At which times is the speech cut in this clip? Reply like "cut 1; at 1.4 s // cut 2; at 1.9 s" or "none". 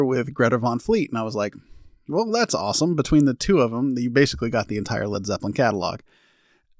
none